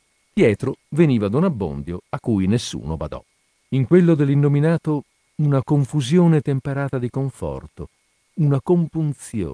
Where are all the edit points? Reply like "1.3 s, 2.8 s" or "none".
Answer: 3.6 s, 8.3 s